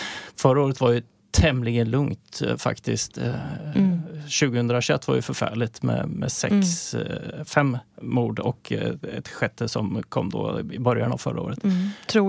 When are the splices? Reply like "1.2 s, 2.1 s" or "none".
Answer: none